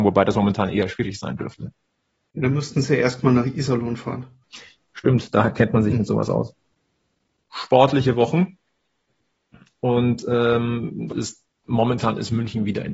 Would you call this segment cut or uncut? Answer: cut